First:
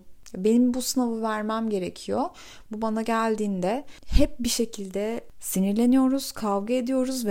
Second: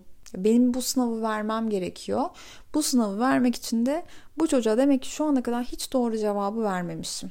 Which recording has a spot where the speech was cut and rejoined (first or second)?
first